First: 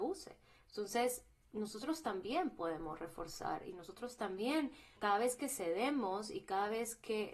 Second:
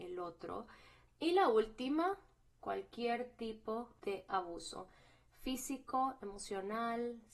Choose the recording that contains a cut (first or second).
second